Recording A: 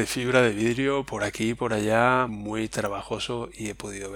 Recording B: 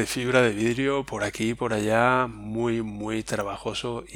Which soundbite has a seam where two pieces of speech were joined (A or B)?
A